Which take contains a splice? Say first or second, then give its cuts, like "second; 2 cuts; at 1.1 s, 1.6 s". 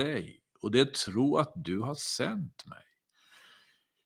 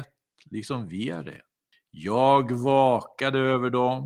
second; 1 cut; at 1.7 s